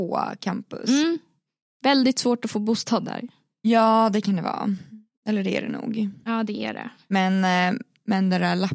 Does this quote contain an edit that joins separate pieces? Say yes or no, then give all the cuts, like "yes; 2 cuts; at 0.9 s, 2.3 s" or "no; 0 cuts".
no; 0 cuts